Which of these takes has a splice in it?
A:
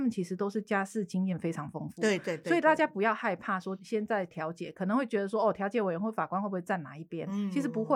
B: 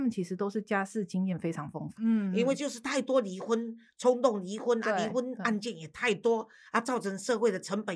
B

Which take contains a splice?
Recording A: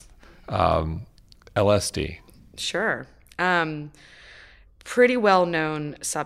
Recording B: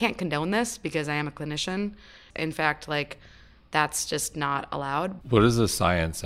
B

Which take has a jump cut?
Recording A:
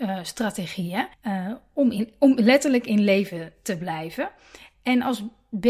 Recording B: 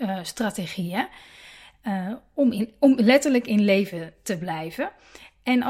A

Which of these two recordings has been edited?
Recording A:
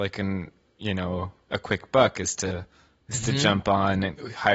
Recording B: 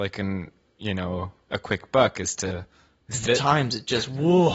B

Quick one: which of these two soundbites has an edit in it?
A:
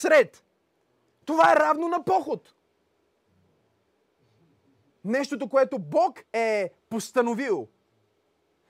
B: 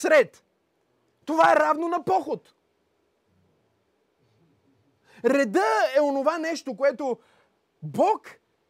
A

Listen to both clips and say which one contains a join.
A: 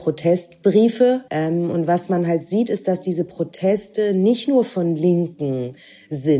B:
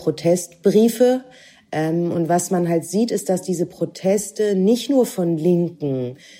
A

